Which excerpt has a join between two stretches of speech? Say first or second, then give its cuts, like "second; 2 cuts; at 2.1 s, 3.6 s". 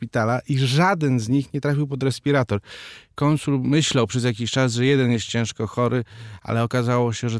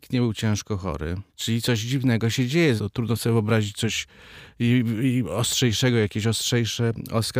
second; 2 cuts; at 1.3 s, 2.8 s